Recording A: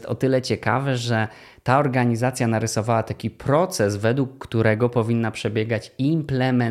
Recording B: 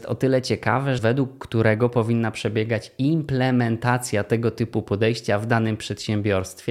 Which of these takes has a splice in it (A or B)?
B